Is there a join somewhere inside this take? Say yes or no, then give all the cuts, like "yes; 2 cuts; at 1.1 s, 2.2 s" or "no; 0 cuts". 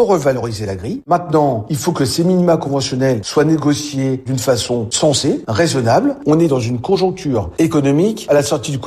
no; 0 cuts